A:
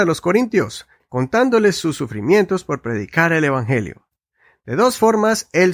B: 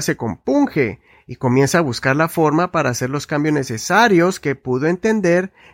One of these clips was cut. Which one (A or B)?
A